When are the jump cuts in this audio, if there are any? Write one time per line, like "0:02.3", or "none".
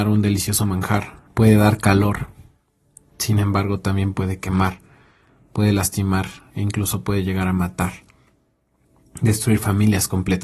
0:01.3